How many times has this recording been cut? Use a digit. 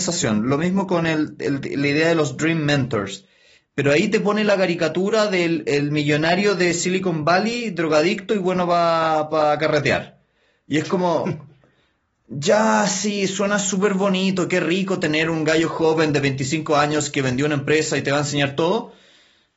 1